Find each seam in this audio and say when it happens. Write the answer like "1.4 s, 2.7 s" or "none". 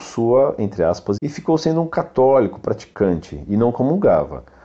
1.2 s